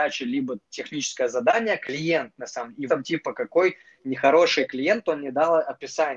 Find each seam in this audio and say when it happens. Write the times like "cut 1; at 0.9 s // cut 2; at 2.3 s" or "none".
cut 1; at 2.9 s